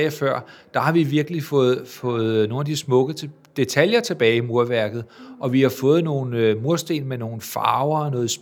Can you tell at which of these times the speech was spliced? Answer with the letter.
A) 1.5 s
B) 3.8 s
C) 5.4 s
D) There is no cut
D